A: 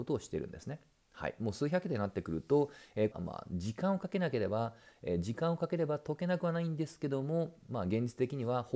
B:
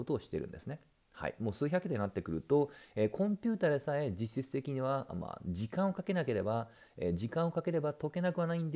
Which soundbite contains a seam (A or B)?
A